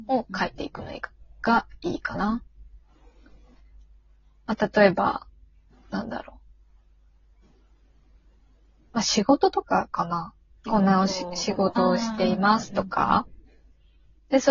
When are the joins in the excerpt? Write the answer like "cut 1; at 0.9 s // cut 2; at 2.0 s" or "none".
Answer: cut 1; at 10.6 s

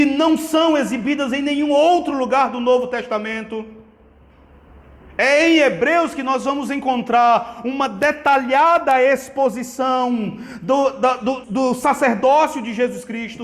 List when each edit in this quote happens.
cut 1; at 11.4 s

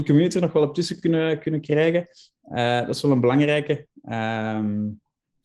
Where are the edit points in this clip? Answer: none

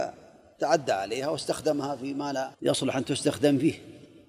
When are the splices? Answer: cut 1; at 2.5 s

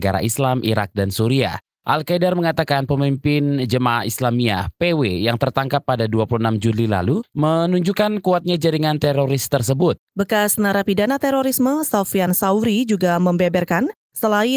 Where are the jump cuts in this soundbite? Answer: cut 1; at 7.3 s // cut 2; at 10.1 s

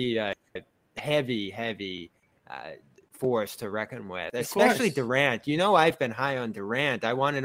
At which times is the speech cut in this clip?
none

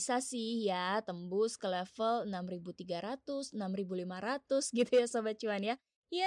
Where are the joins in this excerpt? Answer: cut 1; at 3.5 s

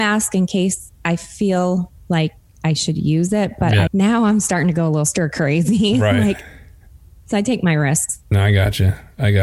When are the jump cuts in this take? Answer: cut 1; at 3.9 s

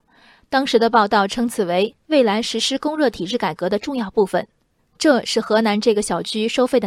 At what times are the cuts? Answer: cut 1; at 4.8 s

